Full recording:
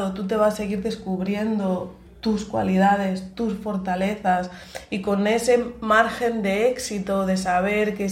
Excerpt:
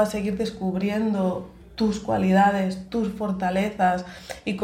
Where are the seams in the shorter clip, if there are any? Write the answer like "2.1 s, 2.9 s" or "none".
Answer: none